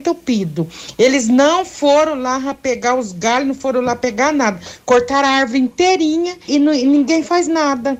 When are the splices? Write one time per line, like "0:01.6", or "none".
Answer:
0:06.5